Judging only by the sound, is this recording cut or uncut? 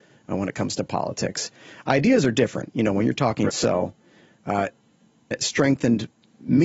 cut